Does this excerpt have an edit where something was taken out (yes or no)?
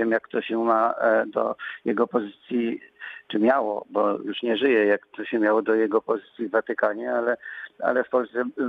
no